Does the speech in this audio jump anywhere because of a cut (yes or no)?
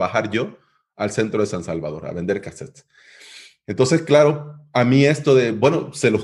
no